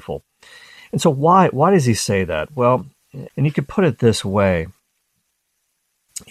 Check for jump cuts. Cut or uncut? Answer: cut